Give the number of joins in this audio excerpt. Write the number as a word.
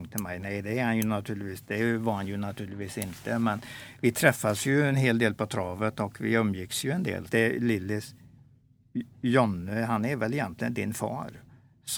one